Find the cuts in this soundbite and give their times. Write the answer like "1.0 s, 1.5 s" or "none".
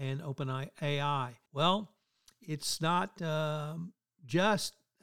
1.5 s